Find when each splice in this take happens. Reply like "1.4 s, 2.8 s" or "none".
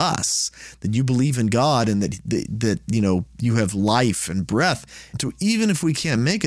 5.1 s